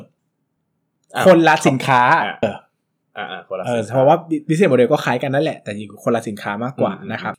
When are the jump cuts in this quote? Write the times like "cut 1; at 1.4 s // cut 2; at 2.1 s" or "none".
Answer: cut 1; at 2.4 s